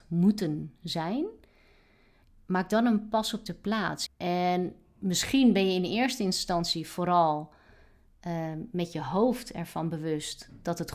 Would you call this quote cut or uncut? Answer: cut